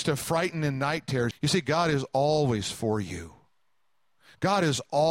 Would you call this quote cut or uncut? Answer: cut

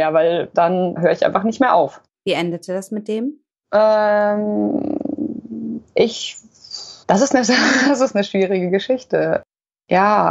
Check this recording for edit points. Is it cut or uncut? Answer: cut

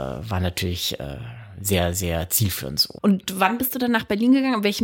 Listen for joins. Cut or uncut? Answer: cut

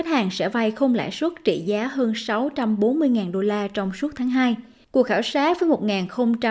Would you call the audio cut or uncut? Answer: cut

